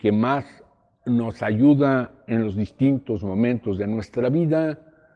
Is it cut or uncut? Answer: uncut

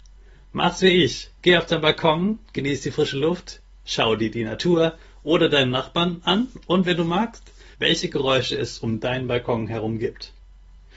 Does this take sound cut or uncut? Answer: cut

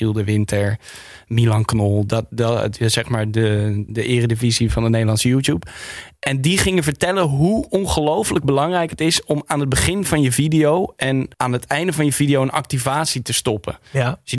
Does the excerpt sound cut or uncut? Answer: cut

